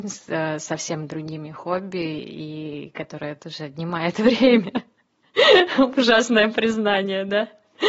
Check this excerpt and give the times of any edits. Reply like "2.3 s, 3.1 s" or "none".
none